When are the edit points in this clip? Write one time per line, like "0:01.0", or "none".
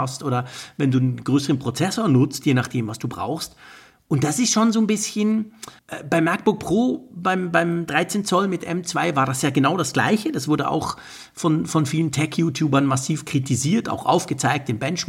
0:05.8